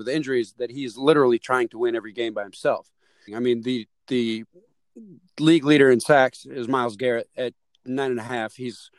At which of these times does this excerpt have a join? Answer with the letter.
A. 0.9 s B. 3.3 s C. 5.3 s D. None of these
B